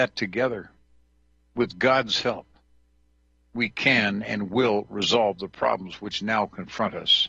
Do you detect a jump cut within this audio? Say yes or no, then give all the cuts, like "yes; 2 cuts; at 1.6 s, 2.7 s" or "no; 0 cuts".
no; 0 cuts